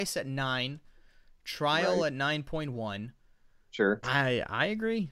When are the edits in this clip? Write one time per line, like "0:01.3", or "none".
0:04.0